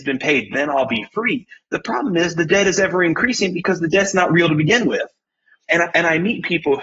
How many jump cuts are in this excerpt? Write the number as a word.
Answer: one